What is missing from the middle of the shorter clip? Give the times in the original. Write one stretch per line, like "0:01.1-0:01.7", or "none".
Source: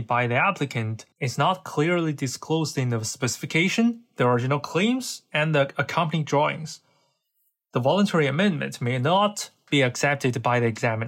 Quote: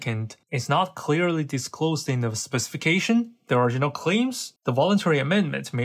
0:05.2-0:07.6